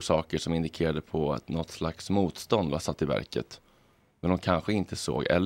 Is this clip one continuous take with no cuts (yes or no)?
yes